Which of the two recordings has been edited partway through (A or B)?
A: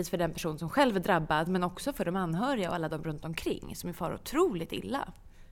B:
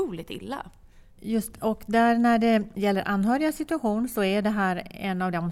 B